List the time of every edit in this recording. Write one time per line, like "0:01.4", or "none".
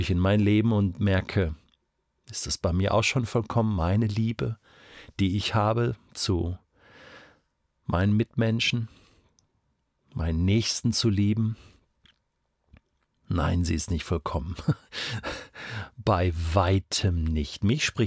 none